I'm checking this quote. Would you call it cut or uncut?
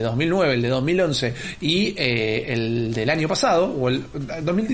uncut